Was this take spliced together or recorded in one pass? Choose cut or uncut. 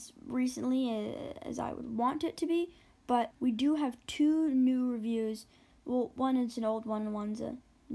cut